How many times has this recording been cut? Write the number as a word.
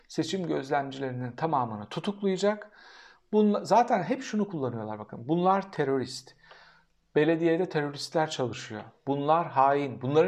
zero